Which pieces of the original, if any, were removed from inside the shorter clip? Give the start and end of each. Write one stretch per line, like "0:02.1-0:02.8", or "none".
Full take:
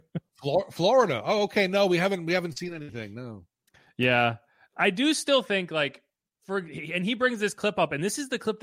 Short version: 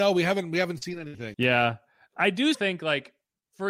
0:03.1-0:03.9
0:05.1-0:05.4

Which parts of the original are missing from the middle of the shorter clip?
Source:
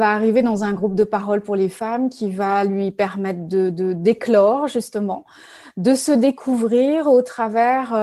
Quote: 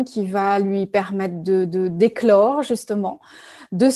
none

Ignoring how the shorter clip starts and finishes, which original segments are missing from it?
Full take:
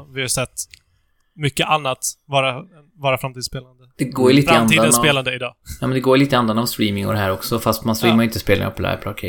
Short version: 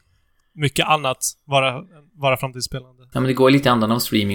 0:03.9-0:05.8

